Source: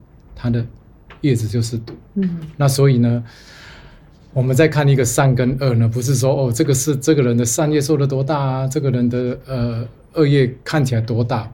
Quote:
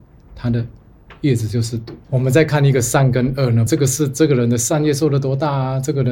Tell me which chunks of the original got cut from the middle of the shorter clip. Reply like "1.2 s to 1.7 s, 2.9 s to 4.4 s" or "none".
2.0 s to 4.3 s, 5.9 s to 6.5 s